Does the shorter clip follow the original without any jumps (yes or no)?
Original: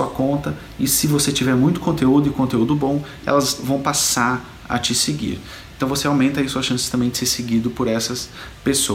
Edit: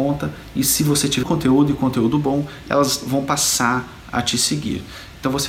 no